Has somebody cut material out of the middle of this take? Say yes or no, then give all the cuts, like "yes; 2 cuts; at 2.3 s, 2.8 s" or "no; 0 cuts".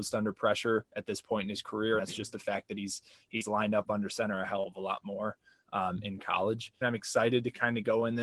yes; 2 cuts; at 2.0 s, 6.8 s